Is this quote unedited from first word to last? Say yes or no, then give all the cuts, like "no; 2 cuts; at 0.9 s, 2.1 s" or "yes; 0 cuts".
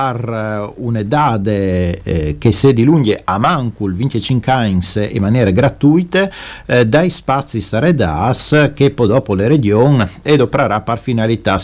yes; 0 cuts